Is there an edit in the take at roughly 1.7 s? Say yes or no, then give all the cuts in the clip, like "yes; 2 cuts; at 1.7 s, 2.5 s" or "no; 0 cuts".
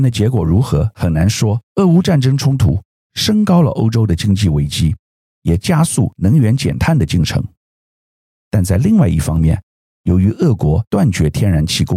yes; 1 cut; at 1.7 s